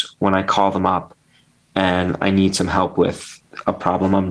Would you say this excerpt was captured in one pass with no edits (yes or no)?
yes